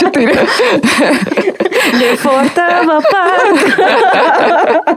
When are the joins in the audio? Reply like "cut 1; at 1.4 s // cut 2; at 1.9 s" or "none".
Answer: none